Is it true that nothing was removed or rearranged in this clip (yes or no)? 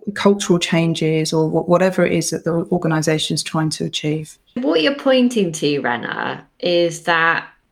no